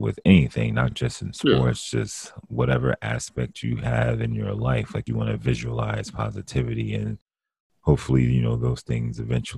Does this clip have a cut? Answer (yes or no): no